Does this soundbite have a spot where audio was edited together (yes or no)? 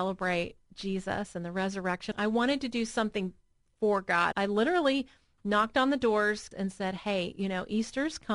yes